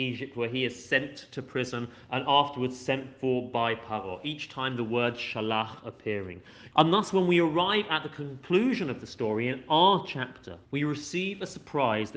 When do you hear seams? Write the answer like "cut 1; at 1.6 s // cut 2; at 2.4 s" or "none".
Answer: cut 1; at 6.7 s // cut 2; at 10.7 s